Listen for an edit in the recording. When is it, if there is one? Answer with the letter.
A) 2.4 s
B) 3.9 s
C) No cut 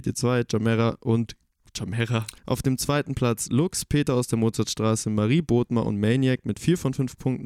A